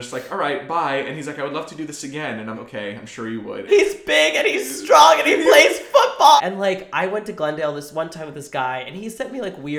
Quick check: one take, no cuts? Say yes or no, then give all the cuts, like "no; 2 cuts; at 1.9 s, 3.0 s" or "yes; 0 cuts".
no; 3 cuts; at 2.5 s, 3.7 s, 6.4 s